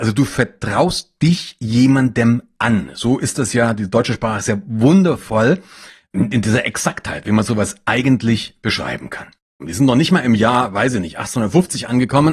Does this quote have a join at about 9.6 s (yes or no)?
yes